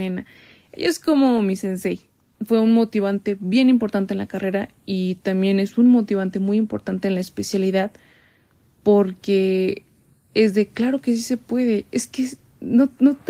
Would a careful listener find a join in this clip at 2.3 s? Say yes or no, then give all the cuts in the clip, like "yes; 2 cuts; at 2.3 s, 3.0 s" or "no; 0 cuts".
yes; 1 cut; at 2.3 s